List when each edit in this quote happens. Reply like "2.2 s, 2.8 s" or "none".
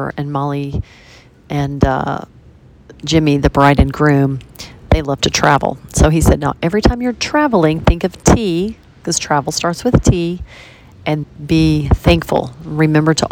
11.2 s